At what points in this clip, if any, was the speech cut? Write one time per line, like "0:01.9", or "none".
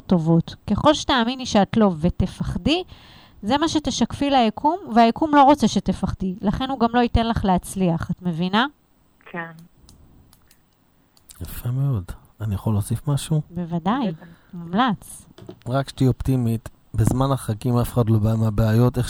none